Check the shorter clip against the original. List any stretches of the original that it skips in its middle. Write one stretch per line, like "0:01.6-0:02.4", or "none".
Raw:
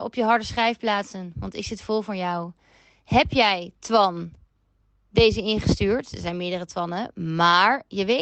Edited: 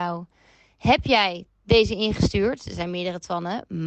0:03.7-0:04.9